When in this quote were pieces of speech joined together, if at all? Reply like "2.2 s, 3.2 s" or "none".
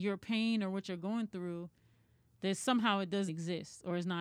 3.3 s